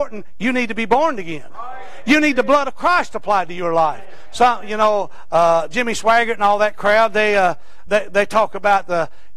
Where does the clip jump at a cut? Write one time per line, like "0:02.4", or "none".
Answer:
0:07.9